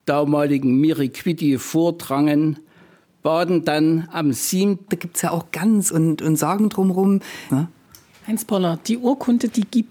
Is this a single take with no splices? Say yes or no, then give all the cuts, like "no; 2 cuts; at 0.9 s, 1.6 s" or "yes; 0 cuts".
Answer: no; 3 cuts; at 4.9 s, 5.9 s, 7.5 s